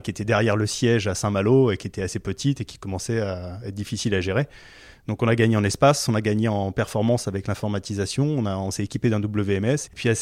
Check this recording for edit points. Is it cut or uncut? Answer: uncut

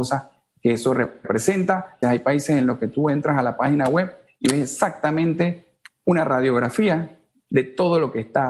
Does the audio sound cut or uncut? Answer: cut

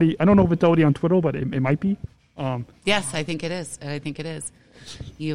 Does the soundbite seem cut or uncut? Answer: uncut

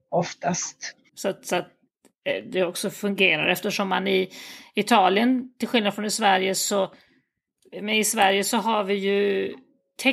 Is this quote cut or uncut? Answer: cut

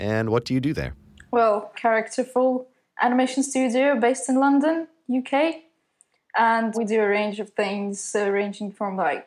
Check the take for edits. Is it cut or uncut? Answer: cut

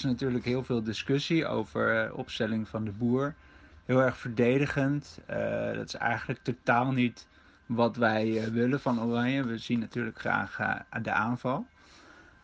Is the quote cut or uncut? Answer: uncut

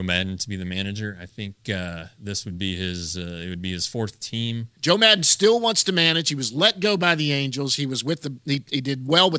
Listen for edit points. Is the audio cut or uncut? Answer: cut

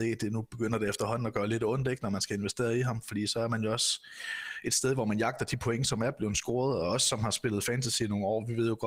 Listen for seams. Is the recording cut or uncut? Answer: uncut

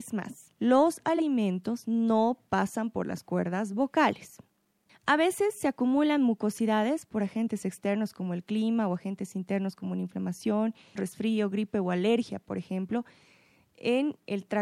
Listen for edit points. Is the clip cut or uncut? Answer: cut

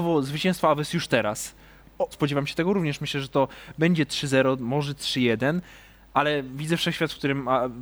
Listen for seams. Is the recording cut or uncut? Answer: cut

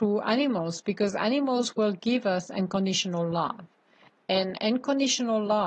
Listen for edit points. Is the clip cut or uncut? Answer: uncut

